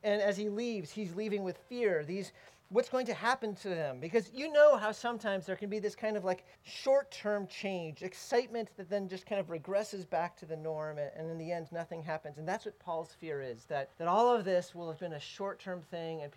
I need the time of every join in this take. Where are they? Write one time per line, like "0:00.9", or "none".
0:06.5
0:13.9
0:15.0

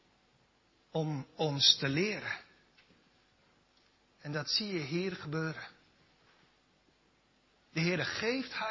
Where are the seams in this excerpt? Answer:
0:04.1

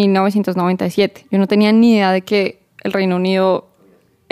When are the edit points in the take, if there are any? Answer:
none

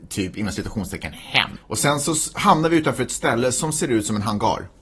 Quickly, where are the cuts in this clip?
0:01.6

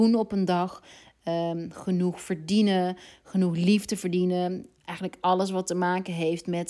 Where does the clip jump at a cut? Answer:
none

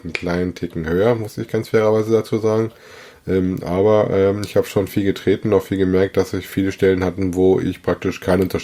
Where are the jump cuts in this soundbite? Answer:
none

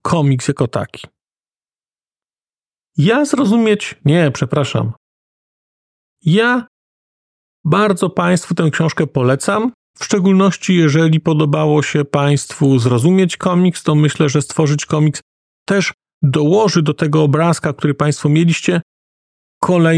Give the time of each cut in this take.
none

